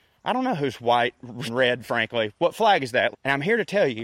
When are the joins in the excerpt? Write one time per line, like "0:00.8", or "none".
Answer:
0:01.5
0:03.1